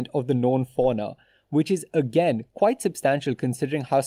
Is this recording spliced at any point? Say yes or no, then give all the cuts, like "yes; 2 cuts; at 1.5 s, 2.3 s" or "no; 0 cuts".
no; 0 cuts